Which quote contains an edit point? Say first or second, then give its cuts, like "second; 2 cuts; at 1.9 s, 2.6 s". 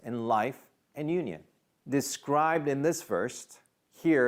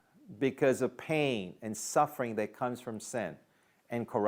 first; 1 cut; at 1.8 s